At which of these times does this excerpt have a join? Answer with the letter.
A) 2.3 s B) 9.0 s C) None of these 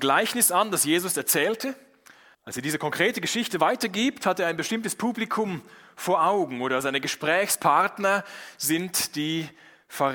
A